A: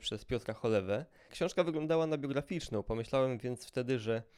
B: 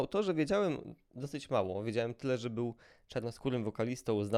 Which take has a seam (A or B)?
A